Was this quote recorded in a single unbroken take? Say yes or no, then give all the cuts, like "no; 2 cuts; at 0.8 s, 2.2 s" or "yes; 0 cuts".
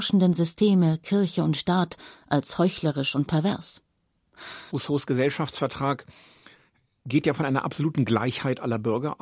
no; 1 cut; at 4.7 s